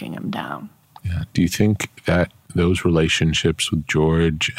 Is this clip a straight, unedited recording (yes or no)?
yes